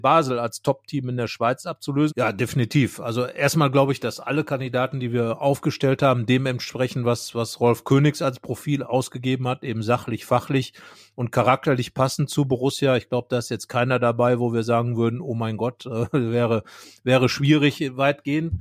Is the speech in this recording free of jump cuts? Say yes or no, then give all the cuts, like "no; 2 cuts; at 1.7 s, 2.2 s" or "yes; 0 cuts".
no; 1 cut; at 2.1 s